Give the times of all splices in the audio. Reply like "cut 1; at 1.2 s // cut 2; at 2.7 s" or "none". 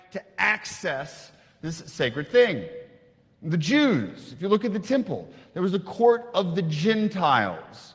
none